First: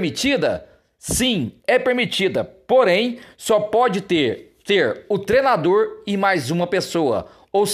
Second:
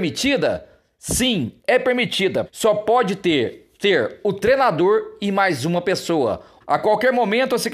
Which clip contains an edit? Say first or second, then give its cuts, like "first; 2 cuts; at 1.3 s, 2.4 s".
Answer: second; 2 cuts; at 2.5 s, 6.6 s